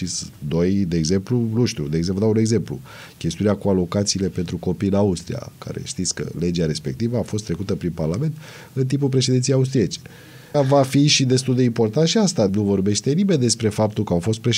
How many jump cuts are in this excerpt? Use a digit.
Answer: 2